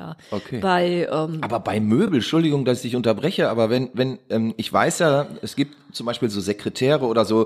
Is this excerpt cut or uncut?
uncut